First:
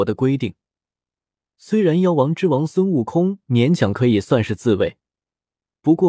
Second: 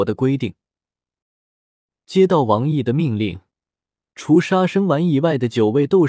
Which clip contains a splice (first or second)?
second